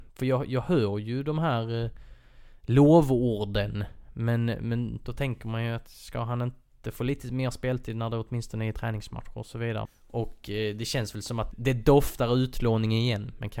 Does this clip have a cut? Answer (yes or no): yes